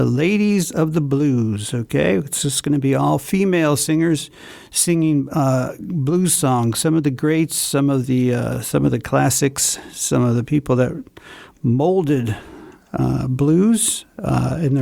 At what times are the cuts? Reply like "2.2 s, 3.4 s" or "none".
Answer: none